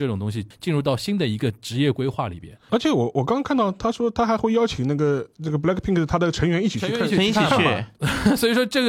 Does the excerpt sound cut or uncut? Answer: cut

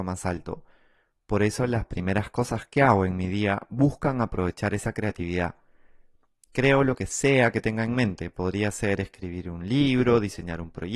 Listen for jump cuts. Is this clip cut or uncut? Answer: uncut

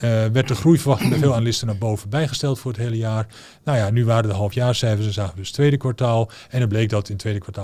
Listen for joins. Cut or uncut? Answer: uncut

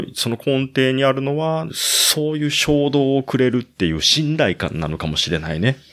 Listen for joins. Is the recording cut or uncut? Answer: cut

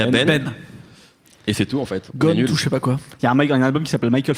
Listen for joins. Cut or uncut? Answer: uncut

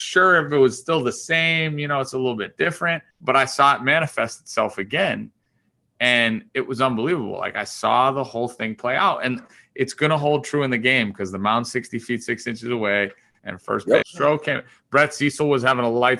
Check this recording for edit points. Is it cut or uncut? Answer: cut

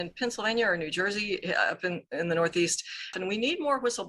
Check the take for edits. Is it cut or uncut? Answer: cut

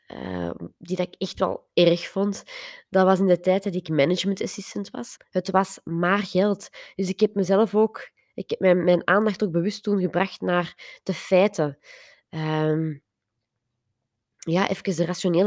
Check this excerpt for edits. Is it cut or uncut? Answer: cut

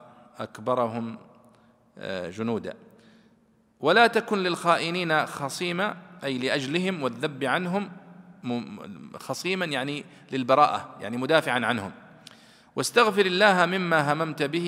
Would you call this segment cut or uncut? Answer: uncut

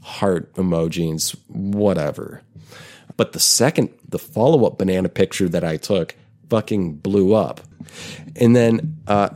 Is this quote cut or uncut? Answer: cut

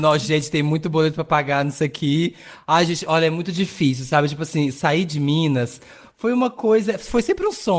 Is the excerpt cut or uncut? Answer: uncut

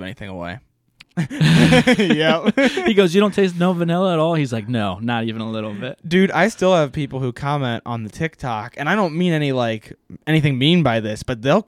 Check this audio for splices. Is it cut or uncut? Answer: cut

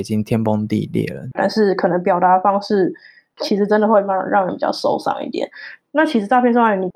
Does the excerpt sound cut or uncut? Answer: cut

